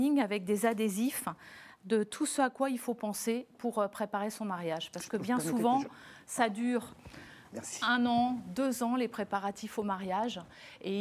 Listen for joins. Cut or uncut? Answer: uncut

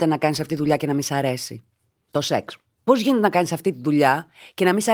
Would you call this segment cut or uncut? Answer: uncut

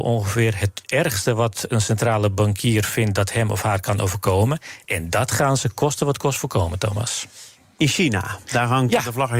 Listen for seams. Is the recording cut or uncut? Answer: uncut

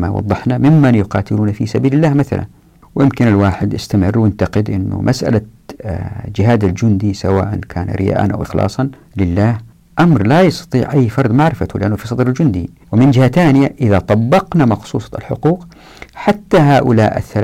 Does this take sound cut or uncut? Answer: cut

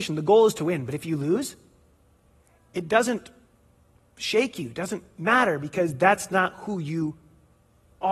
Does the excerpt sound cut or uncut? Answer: uncut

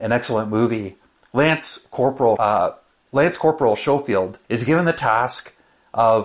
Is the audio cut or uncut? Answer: cut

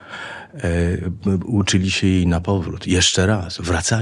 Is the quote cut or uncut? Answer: uncut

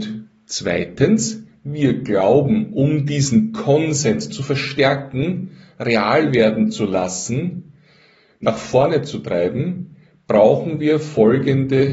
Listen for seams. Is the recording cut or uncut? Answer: uncut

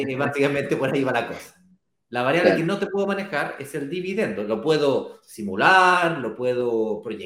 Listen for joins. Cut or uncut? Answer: uncut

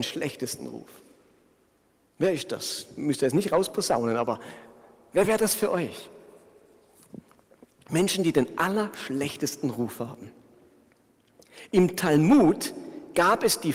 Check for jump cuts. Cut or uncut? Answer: uncut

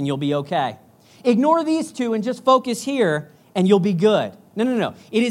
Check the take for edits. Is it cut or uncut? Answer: uncut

